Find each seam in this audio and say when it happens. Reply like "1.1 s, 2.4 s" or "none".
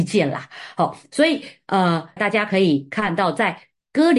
2.2 s

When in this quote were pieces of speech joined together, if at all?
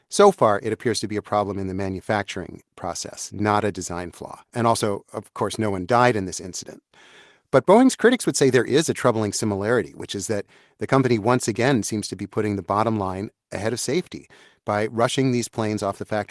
4.5 s

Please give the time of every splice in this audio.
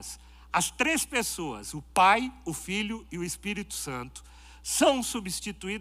none

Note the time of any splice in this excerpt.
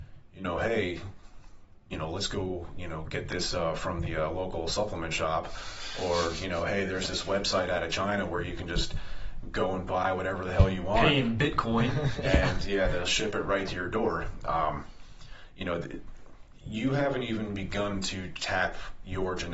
none

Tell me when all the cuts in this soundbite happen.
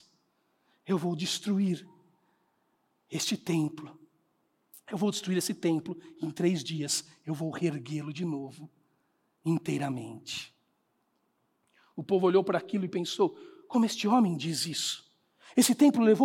none

